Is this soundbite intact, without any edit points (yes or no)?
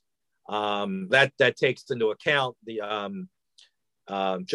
no